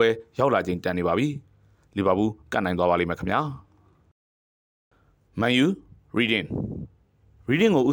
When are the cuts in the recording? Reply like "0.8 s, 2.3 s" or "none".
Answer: none